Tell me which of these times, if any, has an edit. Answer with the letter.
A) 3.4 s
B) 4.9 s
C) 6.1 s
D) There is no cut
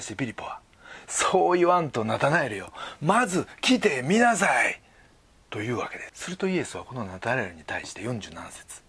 C